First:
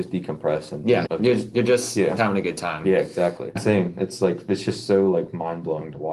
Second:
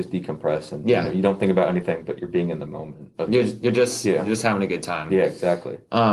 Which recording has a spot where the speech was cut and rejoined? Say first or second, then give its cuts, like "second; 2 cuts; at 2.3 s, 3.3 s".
first; 3 cuts; at 1.1 s, 2.2 s, 3.6 s